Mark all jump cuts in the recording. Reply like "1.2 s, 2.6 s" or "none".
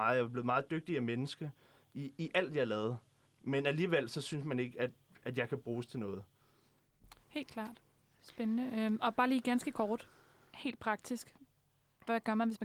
none